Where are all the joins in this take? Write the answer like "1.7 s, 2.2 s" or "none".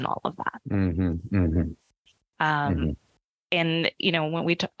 2.3 s